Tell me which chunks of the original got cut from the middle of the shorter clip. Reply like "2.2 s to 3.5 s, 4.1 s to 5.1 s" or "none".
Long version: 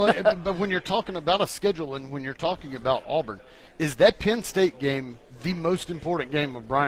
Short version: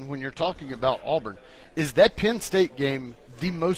none